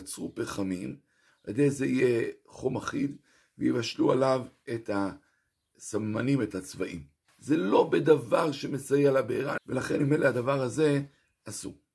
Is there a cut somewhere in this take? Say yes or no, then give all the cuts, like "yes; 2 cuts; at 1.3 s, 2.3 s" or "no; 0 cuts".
yes; 2 cuts; at 7.3 s, 9.6 s